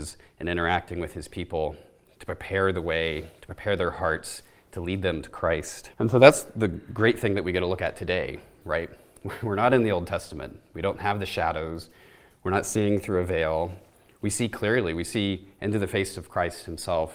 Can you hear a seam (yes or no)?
yes